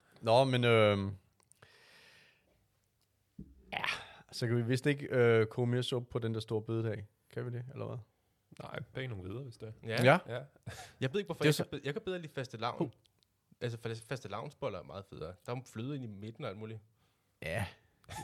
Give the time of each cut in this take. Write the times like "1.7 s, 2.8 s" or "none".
8.9 s